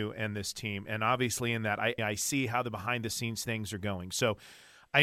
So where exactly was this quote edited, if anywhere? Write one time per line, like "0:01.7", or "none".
0:02.0